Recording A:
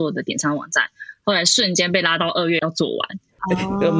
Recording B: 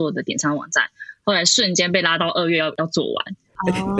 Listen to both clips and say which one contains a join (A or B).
A